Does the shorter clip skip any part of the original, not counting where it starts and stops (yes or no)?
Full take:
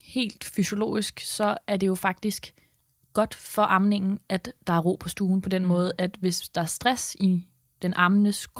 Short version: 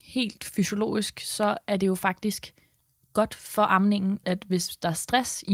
yes